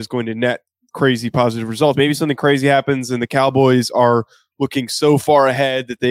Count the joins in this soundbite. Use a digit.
1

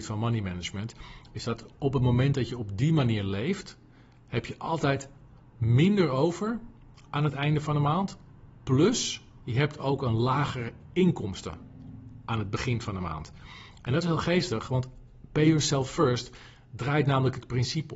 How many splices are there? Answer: 0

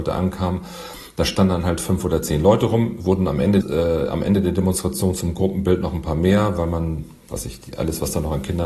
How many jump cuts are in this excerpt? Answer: 1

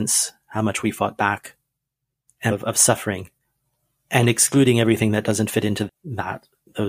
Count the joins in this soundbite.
2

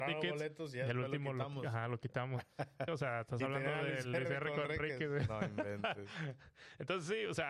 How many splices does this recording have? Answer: 1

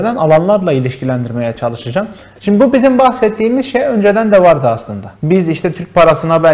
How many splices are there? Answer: 2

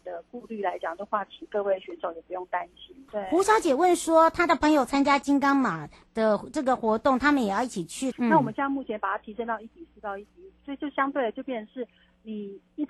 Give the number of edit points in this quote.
2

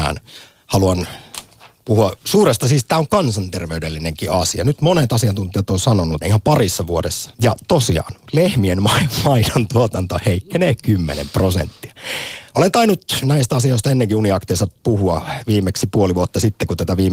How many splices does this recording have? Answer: 2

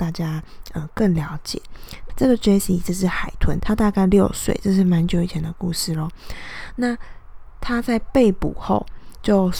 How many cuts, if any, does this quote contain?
2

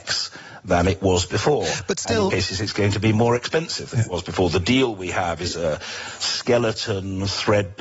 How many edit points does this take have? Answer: 1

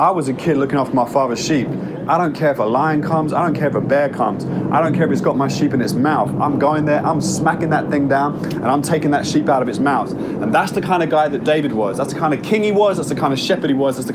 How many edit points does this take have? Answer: 0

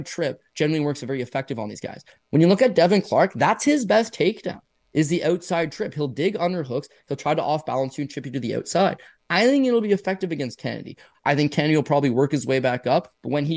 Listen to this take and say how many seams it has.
1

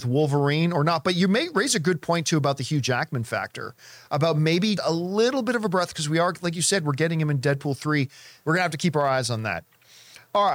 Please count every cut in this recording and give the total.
2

